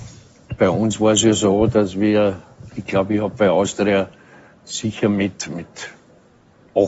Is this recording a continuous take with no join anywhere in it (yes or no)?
yes